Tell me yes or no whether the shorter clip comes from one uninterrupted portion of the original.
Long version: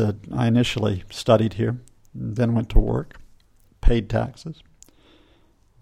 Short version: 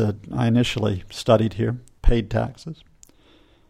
no